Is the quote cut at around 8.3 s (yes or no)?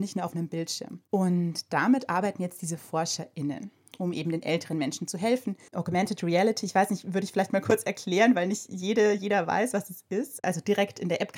no